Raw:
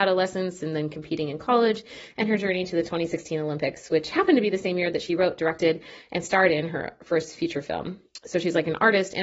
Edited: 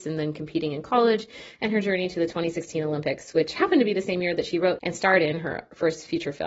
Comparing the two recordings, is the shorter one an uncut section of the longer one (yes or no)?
no